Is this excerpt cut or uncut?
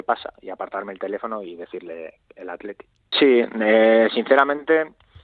cut